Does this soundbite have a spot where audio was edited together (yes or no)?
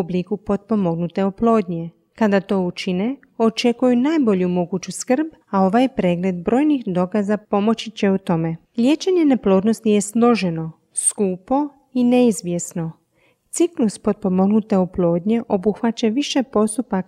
yes